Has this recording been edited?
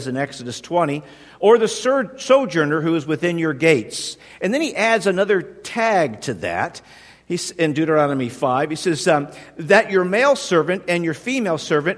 no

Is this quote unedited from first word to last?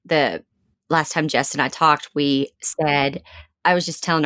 yes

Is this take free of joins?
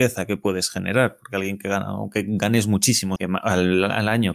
no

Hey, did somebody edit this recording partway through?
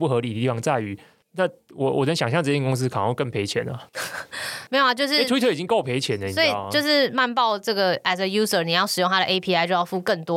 no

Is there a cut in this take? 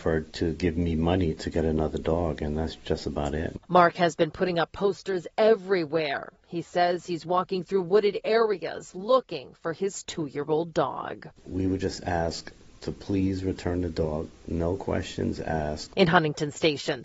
no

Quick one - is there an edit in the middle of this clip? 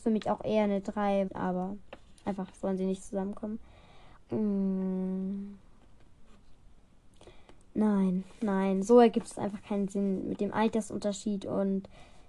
yes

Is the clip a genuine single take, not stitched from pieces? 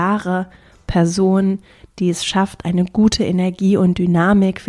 yes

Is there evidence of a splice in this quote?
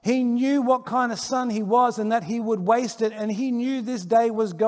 no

